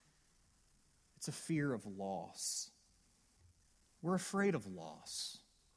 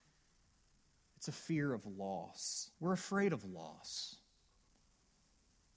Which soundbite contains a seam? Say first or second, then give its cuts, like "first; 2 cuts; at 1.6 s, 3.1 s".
second; 1 cut; at 2.7 s